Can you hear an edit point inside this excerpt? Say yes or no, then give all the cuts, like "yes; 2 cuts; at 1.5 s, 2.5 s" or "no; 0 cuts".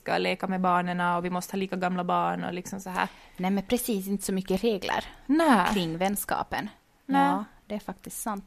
no; 0 cuts